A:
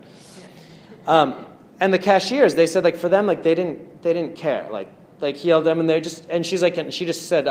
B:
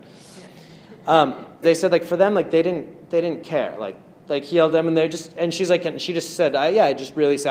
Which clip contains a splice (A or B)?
B